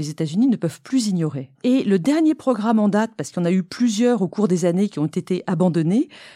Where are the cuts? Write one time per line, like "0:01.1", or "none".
0:01.5